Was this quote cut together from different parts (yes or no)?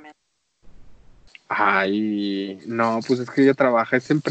no